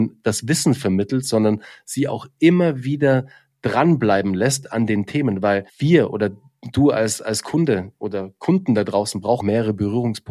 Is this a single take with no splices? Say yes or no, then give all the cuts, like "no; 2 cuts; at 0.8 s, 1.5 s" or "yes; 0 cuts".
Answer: no; 2 cuts; at 5.7 s, 9.4 s